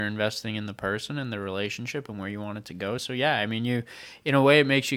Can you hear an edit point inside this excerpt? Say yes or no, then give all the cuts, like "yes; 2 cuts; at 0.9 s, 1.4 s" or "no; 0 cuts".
no; 0 cuts